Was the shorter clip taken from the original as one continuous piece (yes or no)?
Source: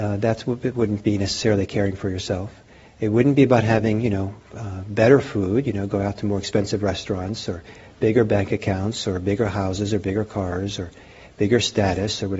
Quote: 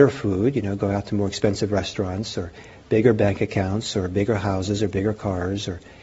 yes